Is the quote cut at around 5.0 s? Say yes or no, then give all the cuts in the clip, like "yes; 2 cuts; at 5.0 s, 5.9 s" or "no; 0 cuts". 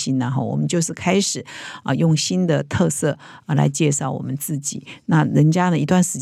no; 0 cuts